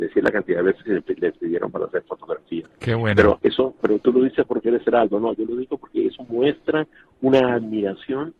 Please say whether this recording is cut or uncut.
cut